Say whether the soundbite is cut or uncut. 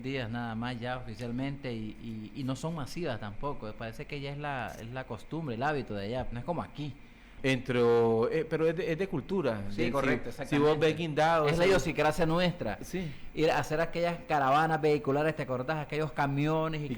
cut